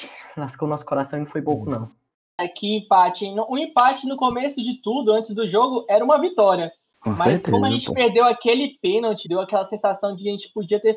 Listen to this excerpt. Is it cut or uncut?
cut